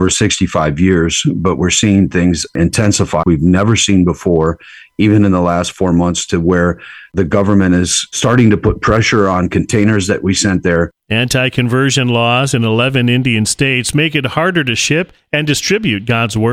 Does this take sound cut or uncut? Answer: cut